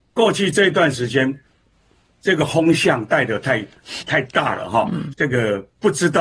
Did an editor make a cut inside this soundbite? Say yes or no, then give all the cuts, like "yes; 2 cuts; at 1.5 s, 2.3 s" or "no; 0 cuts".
yes; 2 cuts; at 4.0 s, 5.1 s